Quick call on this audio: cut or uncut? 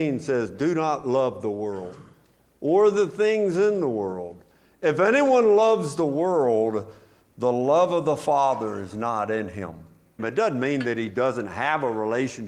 cut